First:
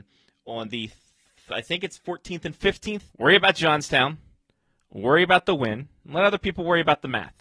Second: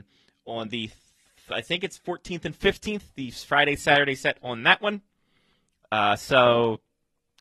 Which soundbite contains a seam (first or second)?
first